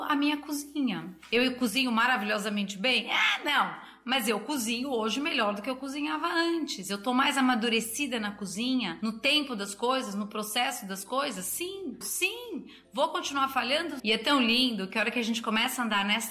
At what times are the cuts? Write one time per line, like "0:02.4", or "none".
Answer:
0:12.0
0:14.0

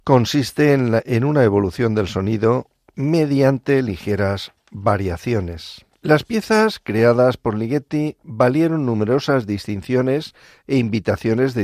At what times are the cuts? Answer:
0:05.9

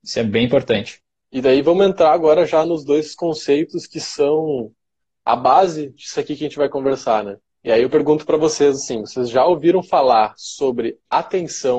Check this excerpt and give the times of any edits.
none

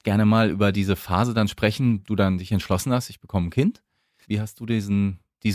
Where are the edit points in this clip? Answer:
0:02.0
0:04.2

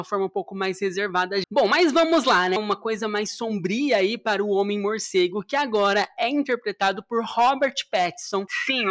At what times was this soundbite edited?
0:01.4
0:02.6

